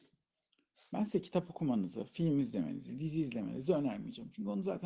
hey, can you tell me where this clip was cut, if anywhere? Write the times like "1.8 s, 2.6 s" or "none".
none